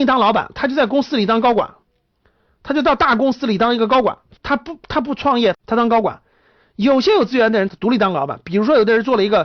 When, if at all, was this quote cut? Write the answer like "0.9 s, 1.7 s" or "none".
4.4 s, 5.5 s, 7.7 s